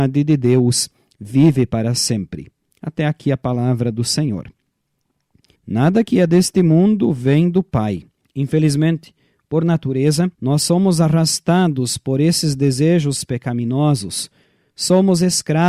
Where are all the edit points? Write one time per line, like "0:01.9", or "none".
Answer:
0:05.6
0:08.2
0:10.3